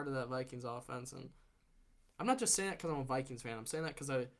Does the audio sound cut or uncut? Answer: uncut